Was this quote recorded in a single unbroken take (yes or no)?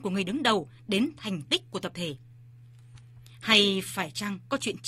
yes